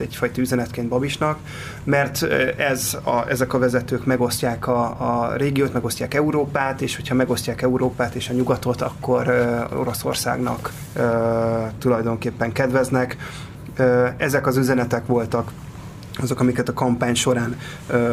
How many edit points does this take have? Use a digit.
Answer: 0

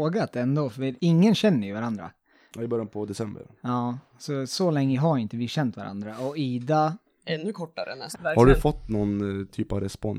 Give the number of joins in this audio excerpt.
3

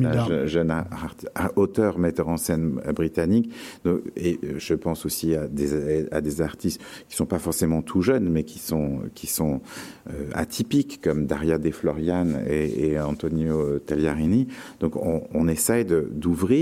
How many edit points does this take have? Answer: 0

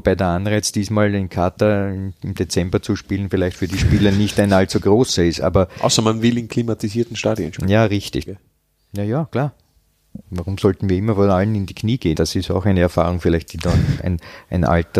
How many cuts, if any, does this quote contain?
3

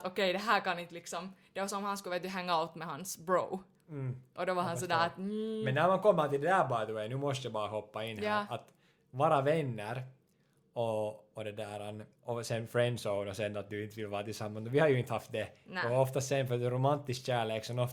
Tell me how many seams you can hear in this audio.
1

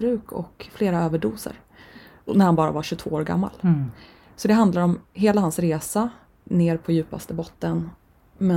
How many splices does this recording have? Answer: 0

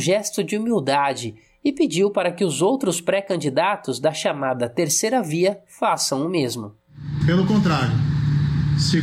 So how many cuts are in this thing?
1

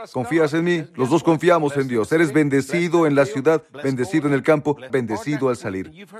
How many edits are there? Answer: 1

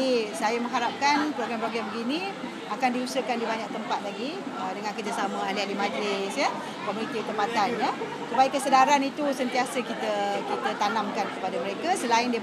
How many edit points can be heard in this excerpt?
0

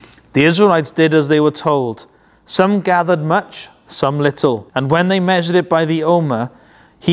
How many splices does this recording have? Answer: 1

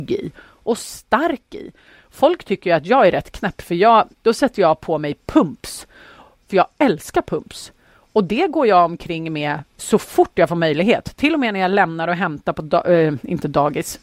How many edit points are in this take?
1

